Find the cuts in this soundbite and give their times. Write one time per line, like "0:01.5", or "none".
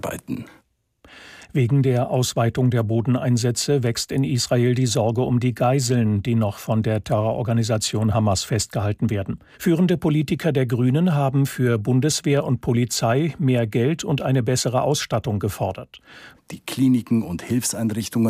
0:09.5
0:16.3